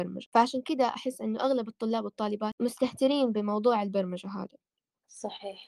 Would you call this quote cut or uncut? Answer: uncut